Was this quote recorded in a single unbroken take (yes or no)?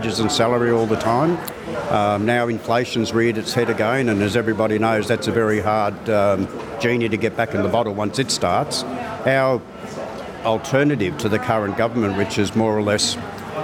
no